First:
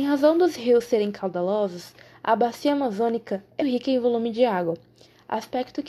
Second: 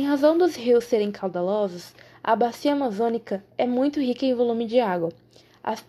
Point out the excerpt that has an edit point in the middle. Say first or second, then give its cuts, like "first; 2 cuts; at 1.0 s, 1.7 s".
first; 1 cut; at 3.6 s